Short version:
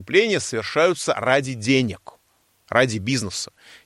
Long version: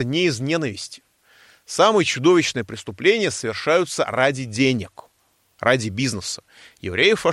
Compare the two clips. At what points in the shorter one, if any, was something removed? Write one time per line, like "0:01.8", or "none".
none

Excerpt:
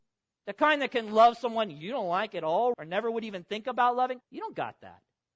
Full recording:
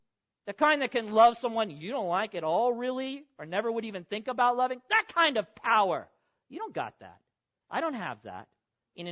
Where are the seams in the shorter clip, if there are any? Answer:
0:02.7
0:04.2

